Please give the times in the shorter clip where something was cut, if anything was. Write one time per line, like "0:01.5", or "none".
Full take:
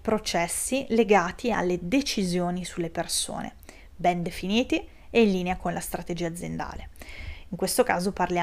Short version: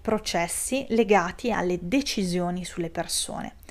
none